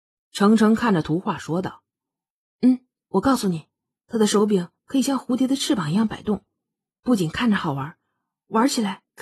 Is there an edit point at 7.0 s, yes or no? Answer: no